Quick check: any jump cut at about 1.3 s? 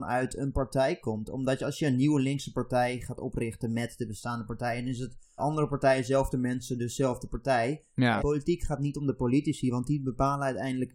no; 2 cuts; at 5.4 s, 8.2 s

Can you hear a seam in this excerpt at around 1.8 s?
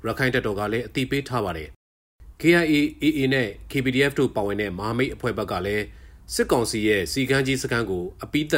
yes; 1 cut; at 1.8 s

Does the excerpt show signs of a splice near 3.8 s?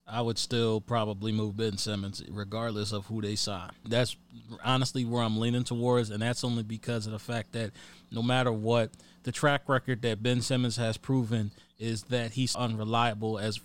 yes; 2 cuts; at 3.8 s, 12.5 s

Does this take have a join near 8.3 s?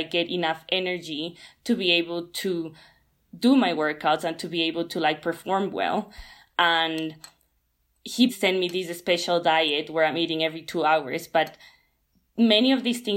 yes; 2 cuts; at 6.5 s, 8.3 s

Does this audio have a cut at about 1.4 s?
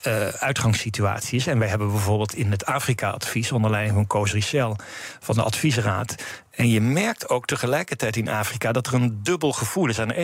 no; 1 cut; at 6.4 s

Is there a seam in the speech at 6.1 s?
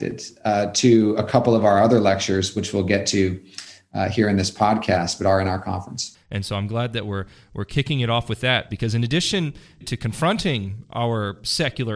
yes; 2 cuts; at 6.1 s, 9.8 s

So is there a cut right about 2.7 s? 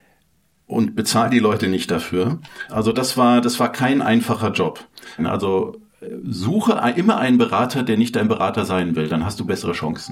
yes; 2 cuts; at 2.7 s, 5.2 s

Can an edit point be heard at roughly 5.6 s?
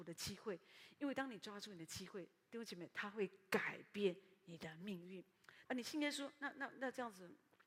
yes; 1 cut; at 5.6 s

